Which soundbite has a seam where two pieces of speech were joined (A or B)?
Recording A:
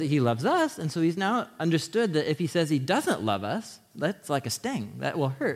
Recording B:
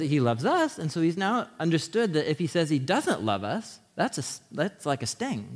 A